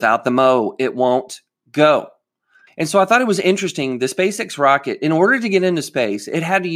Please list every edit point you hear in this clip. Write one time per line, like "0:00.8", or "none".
0:02.7